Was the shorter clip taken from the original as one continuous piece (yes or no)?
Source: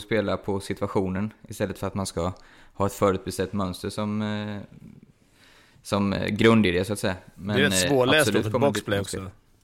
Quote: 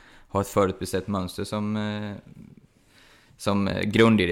yes